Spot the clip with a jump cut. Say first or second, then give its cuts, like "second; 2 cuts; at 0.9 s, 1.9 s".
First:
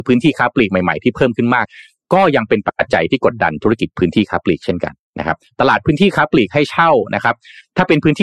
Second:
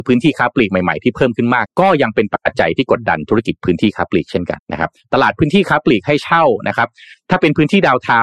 second; 2 cuts; at 1.7 s, 4.6 s